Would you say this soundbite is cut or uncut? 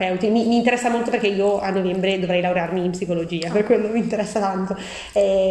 uncut